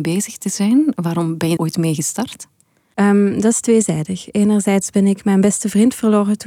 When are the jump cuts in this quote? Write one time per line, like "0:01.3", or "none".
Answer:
0:01.6